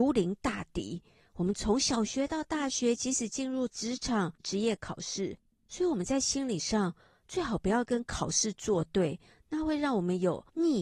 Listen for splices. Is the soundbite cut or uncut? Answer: cut